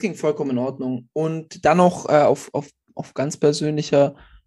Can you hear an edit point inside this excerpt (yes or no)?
no